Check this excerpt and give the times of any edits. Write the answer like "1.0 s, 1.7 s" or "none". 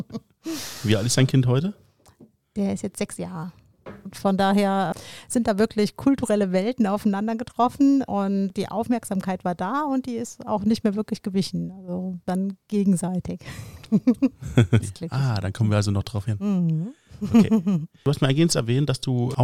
4.1 s, 14.8 s